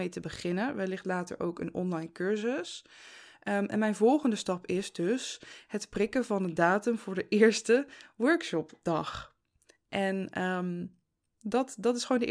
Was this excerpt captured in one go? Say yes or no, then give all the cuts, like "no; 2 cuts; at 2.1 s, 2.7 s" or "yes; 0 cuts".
yes; 0 cuts